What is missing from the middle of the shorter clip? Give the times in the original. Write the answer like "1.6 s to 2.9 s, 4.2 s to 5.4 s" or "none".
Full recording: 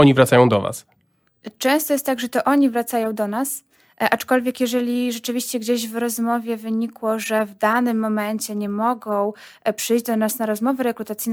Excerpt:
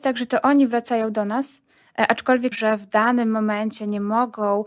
4.5 s to 7.2 s